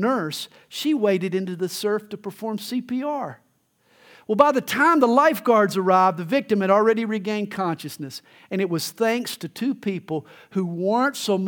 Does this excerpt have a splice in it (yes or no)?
no